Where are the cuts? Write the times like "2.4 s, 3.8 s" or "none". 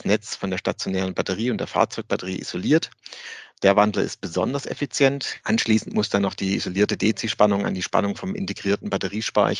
5.4 s